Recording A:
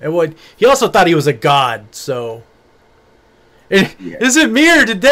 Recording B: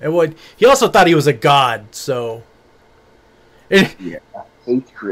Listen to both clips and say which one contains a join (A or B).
B